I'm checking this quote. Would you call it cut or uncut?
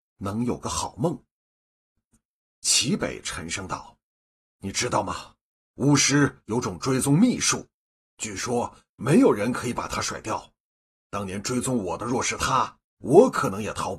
uncut